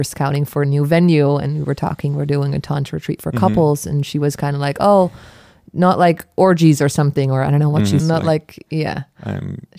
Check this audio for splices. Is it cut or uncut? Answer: cut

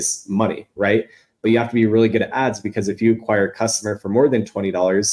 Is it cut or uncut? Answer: uncut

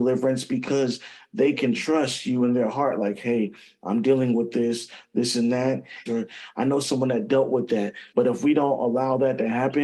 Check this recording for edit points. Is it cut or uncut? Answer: cut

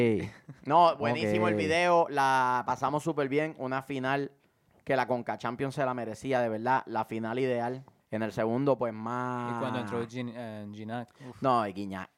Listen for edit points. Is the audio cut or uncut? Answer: cut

